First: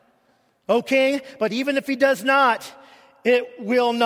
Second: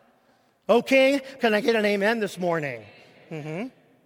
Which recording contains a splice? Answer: second; 1 cut; at 1.4 s

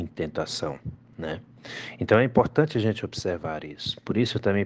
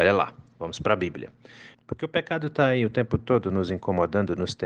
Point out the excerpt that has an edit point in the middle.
second; 1 cut; at 1.7 s

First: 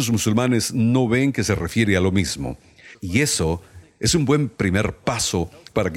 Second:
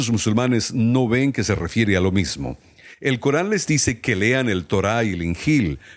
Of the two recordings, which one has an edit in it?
first; 1 cut; at 2.9 s

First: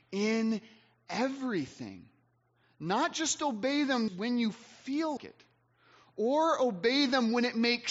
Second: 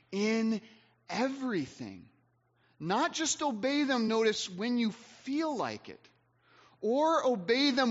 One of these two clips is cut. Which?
first; 2 cuts; at 4.1 s, 5.2 s

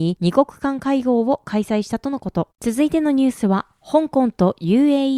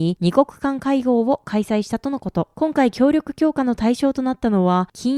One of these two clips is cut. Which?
first; 1 cut; at 2.5 s

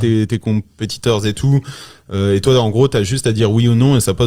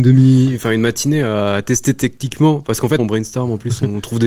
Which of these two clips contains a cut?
second; 1 cut; at 3.0 s

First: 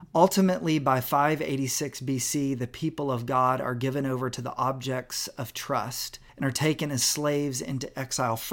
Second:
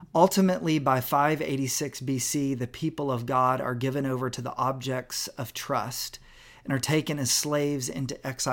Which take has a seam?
first; 1 cut; at 6.3 s

